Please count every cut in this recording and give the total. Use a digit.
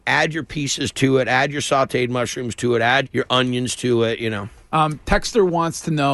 1